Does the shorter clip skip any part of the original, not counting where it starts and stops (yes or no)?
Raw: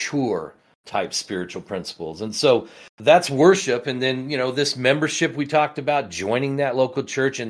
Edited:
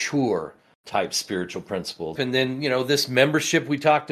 yes